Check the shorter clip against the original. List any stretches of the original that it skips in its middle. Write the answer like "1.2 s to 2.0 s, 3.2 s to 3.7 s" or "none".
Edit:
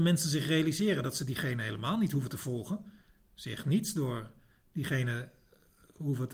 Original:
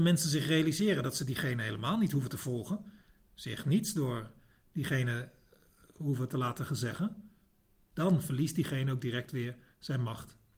none